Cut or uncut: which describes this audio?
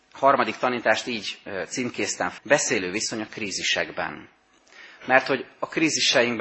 cut